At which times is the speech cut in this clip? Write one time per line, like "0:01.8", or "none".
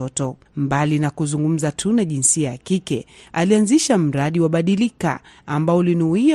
none